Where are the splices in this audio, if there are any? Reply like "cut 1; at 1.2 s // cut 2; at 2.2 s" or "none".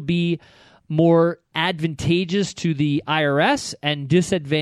cut 1; at 1.5 s